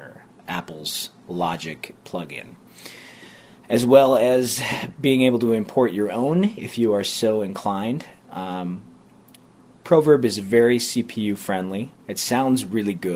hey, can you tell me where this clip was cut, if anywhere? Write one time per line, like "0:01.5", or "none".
none